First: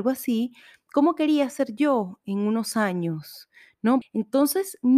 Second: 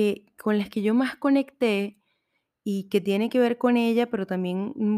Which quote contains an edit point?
first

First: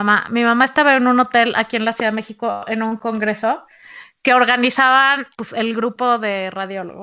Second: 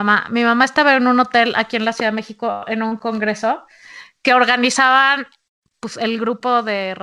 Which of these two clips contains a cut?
first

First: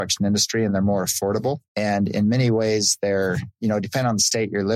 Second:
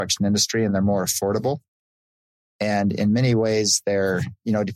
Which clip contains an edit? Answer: first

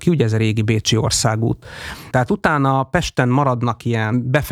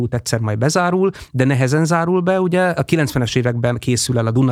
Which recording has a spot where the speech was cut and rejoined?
first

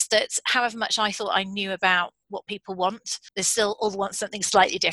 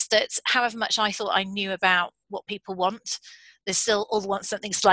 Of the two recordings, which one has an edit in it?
first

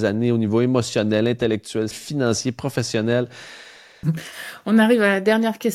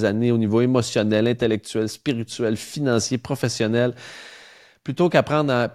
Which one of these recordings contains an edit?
first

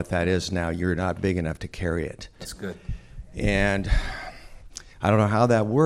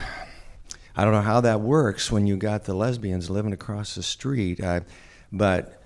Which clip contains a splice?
first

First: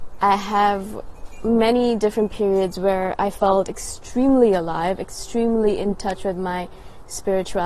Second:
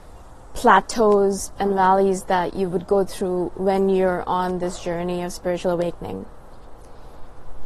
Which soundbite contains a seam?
second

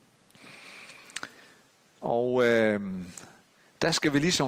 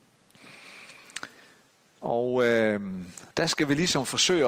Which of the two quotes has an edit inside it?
second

